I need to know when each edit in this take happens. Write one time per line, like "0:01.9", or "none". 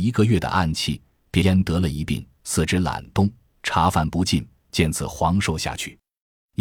0:01.4